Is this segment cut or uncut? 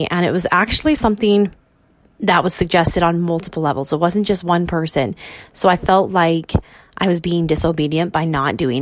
uncut